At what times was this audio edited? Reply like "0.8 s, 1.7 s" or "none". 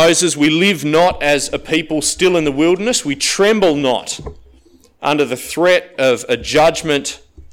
none